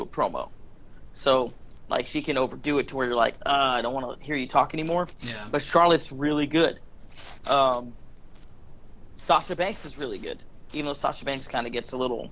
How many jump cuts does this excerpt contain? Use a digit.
0